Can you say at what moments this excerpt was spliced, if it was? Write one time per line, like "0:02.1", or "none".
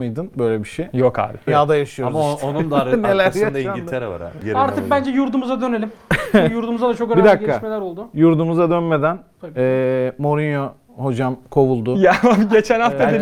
0:01.5